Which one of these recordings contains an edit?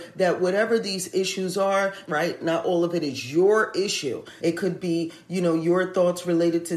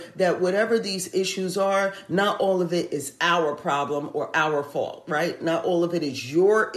first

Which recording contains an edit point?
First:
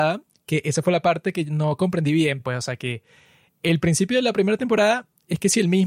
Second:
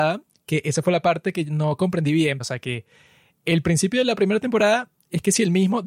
second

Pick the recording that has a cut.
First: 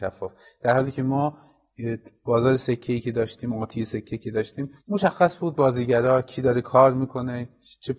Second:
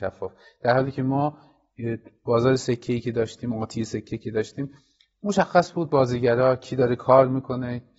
first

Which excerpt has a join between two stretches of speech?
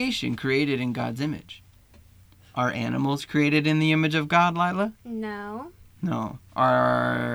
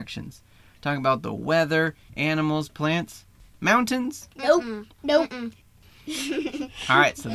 second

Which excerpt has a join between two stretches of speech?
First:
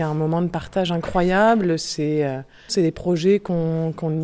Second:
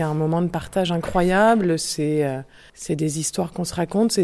first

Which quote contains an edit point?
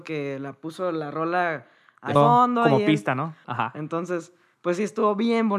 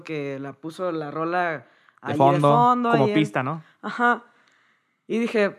first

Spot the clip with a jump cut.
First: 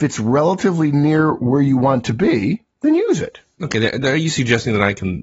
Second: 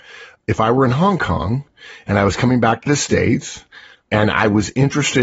first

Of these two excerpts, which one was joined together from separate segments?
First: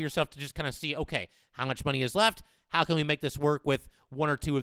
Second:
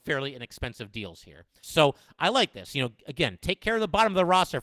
second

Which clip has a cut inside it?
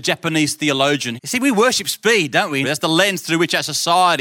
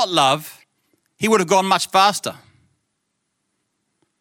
first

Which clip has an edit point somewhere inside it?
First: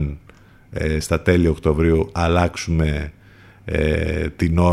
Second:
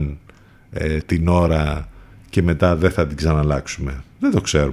second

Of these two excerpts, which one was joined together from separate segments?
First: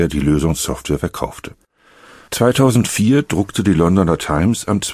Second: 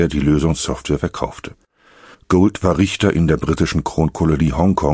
second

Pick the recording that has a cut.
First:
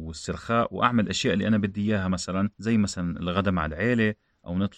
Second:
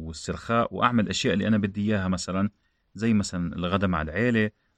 first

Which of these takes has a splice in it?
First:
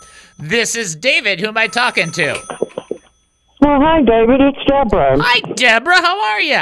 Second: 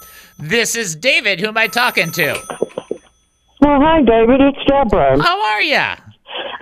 second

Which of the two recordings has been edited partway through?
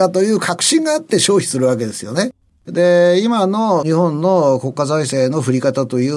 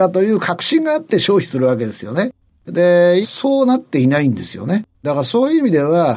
second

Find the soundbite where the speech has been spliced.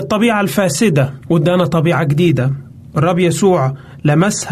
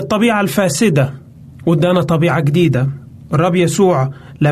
first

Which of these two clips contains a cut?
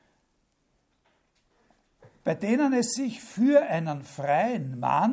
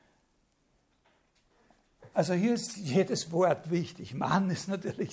second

